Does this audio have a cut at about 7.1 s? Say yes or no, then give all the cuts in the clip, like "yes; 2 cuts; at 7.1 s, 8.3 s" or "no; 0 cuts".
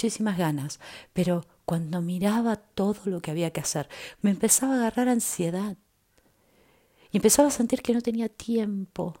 no; 1 cut; at 4.2 s